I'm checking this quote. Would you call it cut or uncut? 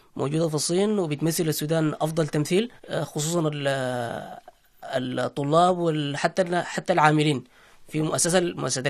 cut